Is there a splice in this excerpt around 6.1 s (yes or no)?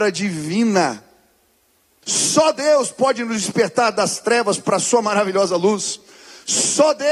no